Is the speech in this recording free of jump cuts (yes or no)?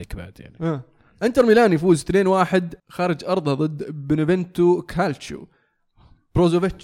no